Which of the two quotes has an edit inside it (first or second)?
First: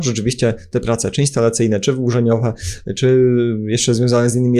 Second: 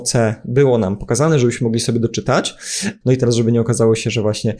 second